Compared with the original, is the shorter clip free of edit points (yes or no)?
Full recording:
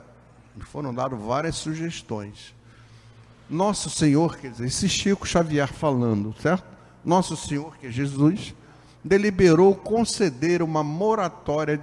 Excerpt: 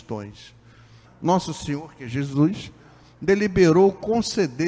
no